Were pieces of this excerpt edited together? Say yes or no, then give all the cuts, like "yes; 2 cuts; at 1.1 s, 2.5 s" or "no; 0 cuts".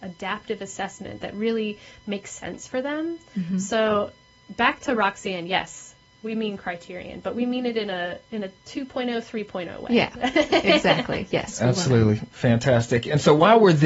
no; 0 cuts